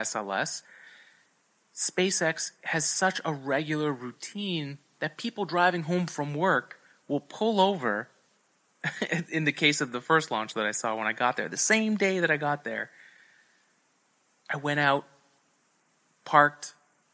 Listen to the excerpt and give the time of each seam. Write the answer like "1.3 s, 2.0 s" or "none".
none